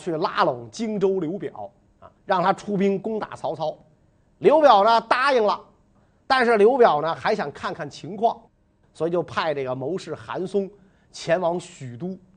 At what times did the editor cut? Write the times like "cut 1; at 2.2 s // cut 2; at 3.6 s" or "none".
cut 1; at 2.2 s